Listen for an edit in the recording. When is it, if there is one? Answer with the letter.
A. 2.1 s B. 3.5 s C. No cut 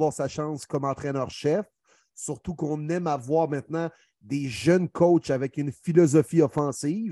C